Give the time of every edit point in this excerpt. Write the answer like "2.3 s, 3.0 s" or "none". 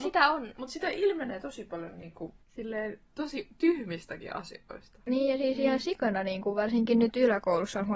2.4 s